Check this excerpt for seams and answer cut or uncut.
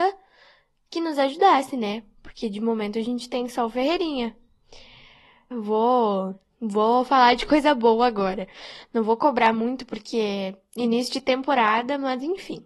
cut